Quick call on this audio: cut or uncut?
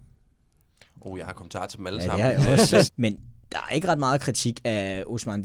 cut